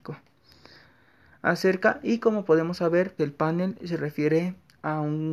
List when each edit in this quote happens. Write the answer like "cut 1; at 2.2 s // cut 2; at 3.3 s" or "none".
cut 1; at 3.2 s